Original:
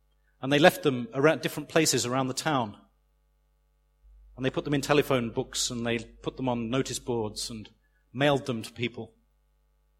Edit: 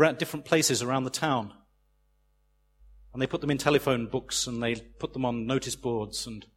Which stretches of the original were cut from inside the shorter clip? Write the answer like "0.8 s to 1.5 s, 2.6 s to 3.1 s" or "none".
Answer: none

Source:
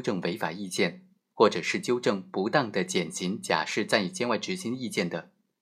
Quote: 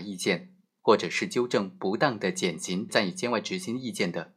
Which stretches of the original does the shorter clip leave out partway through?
3.4 s to 3.9 s

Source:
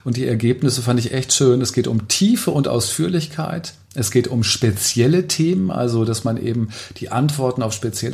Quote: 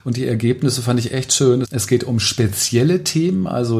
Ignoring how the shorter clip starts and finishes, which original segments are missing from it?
1.6 s to 3.9 s

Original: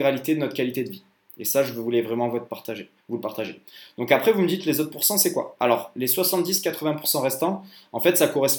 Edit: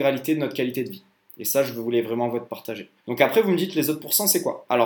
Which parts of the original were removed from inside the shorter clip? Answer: 3.0 s to 3.9 s

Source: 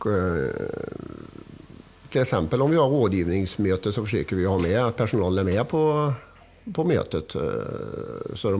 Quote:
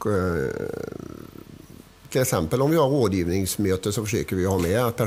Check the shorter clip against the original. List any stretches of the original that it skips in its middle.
none

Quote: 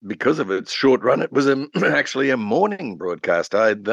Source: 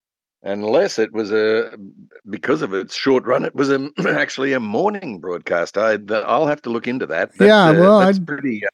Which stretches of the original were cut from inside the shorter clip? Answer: none

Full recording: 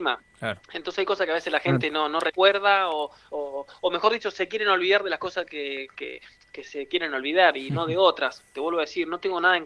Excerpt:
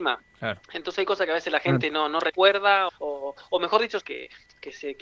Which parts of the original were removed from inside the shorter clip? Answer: 2.9 s to 3.2 s, 4.3 s to 5.9 s

